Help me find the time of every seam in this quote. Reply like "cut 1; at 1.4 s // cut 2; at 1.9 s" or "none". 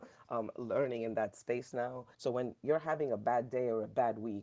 cut 1; at 2.1 s